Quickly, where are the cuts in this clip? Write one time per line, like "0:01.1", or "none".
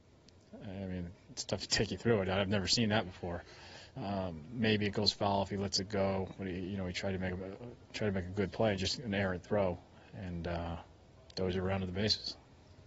0:04.0